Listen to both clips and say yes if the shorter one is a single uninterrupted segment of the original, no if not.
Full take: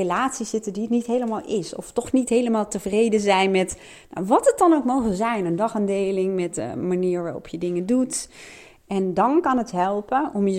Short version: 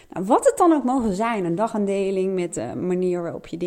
yes